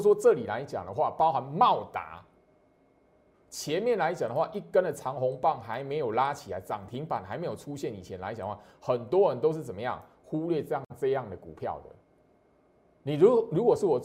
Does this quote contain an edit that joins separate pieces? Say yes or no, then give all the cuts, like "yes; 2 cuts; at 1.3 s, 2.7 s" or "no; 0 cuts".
yes; 1 cut; at 3.3 s